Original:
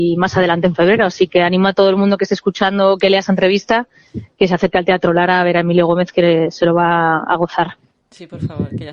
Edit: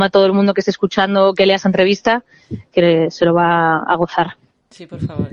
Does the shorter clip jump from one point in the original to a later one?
yes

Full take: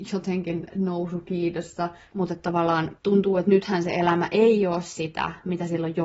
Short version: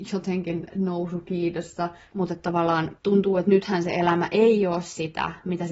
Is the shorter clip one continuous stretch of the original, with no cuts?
yes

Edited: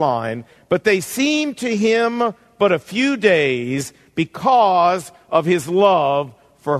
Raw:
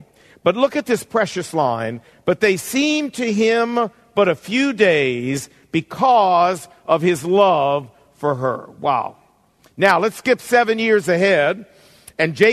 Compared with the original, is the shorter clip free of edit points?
yes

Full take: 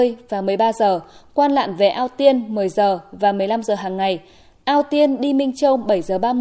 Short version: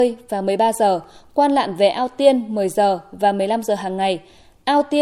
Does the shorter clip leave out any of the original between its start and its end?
no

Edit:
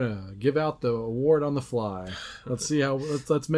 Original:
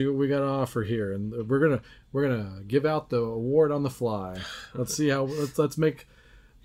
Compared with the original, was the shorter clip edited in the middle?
no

